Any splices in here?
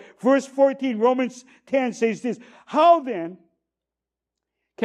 no; 0 cuts

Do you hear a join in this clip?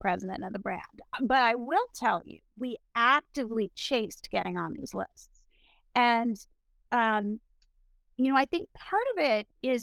no; 0 cuts

